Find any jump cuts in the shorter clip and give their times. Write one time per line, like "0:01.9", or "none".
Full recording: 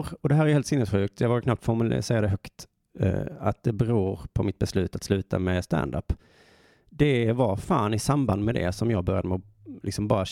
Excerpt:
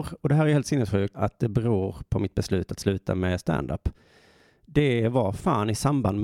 0:01.1